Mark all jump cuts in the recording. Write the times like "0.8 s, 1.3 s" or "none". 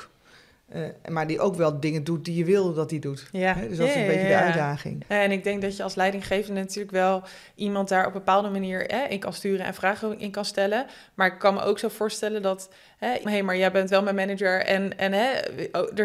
5.0 s, 13.3 s

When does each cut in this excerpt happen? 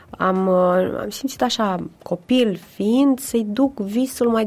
1.9 s

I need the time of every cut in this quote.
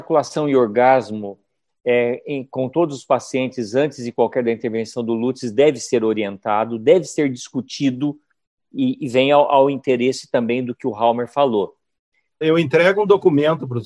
12.4 s

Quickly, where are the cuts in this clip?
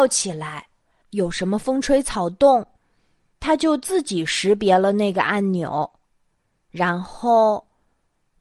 1.0 s

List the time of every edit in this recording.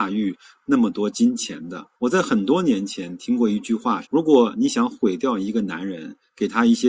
4.0 s

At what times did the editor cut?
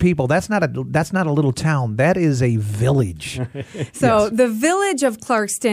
none

